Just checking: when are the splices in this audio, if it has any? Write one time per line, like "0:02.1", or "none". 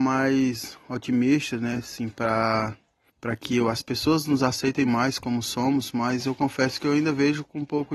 none